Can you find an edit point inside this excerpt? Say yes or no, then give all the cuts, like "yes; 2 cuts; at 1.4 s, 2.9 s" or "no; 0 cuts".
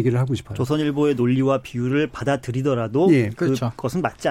no; 0 cuts